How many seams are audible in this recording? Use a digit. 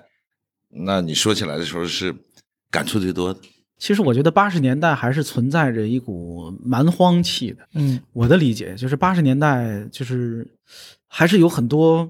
2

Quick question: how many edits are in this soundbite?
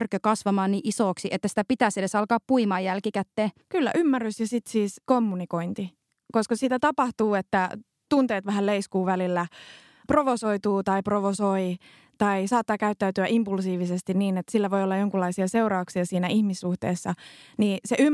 1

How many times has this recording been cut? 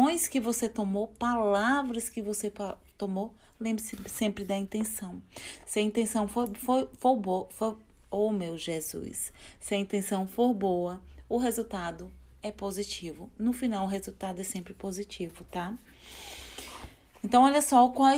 0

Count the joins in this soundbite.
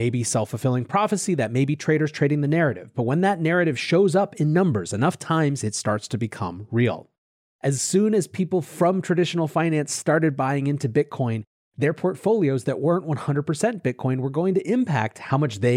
1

